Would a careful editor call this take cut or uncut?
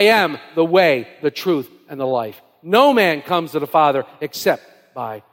uncut